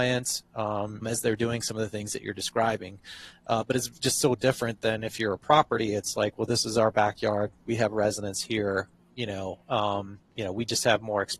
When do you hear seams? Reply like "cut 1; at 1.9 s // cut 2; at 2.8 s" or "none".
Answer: cut 1; at 1.0 s